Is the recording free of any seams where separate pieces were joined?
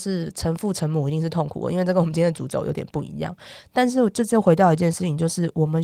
yes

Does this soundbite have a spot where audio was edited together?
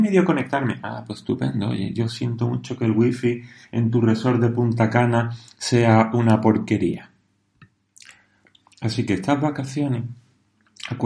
no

